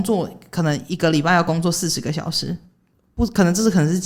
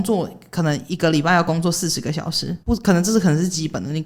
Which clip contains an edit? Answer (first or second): second